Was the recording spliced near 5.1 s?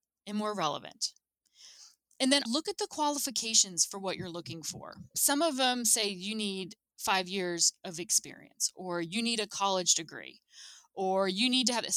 no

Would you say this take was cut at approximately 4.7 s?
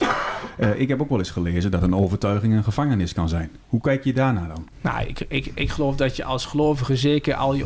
yes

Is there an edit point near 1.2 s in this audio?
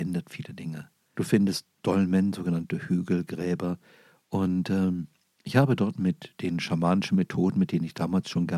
yes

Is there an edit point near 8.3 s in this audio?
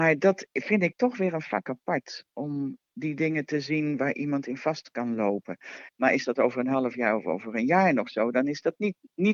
no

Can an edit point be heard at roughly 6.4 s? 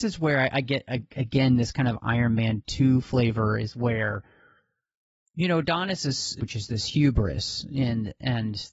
yes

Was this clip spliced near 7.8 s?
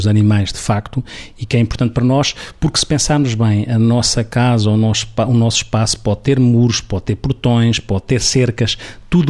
no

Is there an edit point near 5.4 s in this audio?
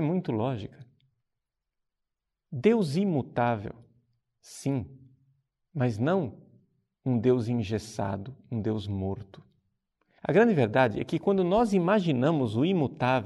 no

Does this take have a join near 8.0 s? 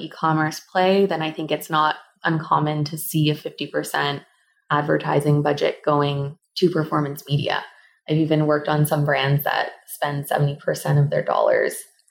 no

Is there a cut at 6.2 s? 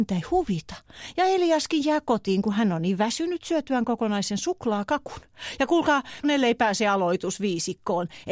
yes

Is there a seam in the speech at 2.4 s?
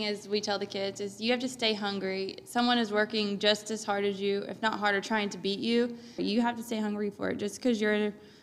no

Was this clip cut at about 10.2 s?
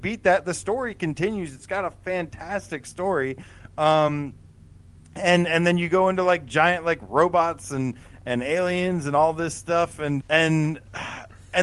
yes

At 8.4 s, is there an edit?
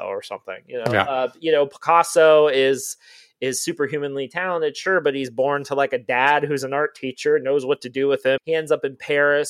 yes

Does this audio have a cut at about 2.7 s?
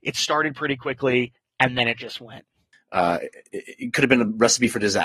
yes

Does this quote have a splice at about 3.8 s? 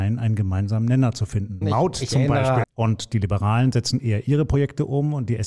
no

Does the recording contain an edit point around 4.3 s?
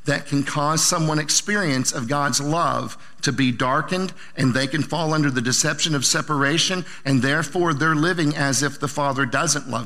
no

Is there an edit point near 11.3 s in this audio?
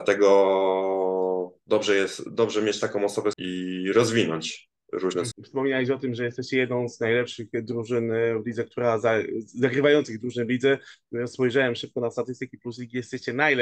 no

